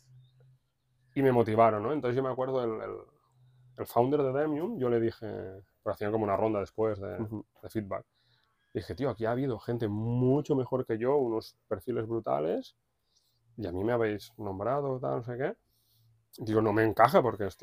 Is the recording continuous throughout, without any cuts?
yes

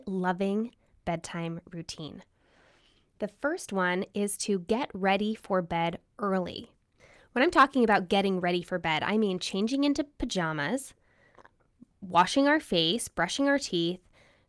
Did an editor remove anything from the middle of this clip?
no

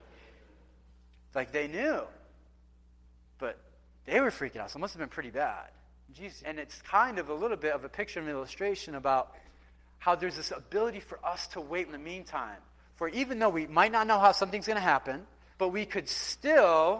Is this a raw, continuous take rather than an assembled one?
no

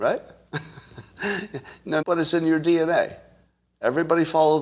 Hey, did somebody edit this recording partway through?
yes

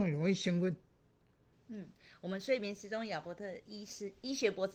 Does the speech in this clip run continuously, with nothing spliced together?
no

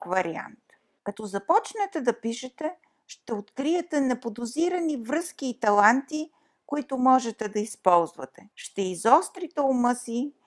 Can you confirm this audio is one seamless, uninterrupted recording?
no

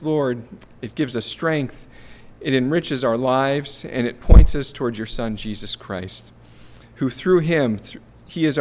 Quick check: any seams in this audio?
no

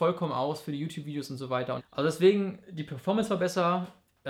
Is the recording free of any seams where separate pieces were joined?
no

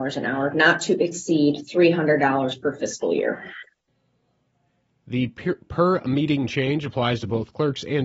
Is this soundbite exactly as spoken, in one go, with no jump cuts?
yes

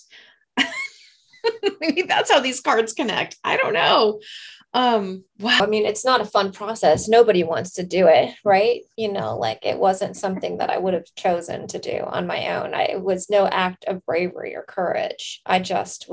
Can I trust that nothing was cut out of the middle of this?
no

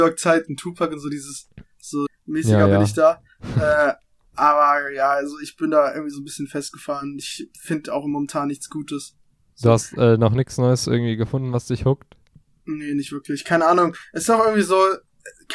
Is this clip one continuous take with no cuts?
no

